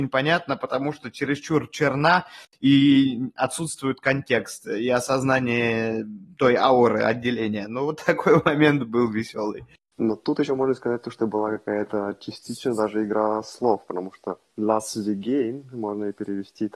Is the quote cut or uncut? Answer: uncut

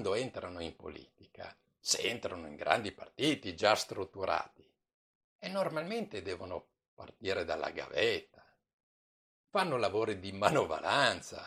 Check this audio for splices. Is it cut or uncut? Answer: uncut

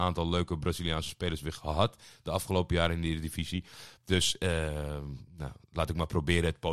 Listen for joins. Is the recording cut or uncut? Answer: uncut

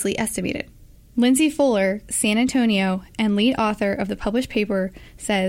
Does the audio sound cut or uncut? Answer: cut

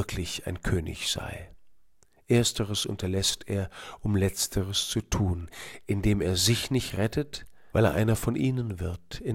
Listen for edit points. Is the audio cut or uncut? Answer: cut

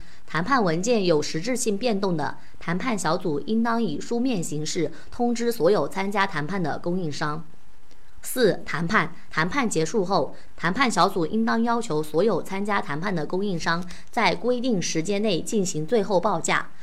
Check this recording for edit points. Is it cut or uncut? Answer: cut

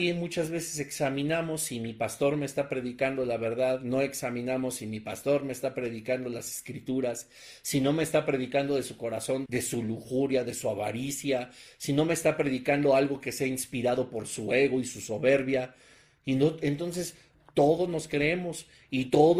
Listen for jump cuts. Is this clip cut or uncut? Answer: cut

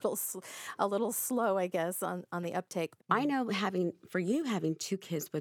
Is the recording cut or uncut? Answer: cut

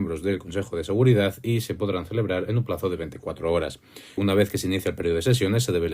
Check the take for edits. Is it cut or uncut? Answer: cut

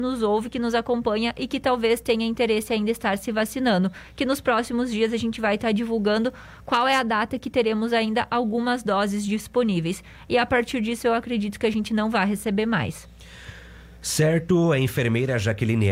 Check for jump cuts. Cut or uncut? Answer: uncut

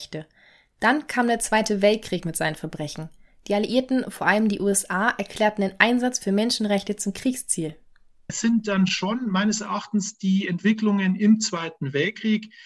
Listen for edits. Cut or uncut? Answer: uncut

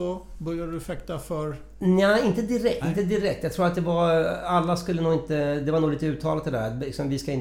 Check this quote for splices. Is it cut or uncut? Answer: cut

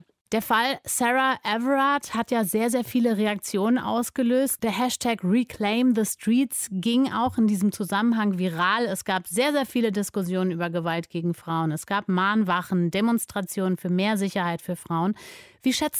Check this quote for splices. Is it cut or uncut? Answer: uncut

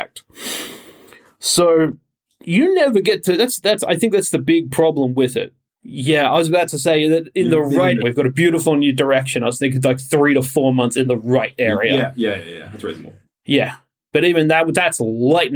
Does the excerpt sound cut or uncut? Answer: cut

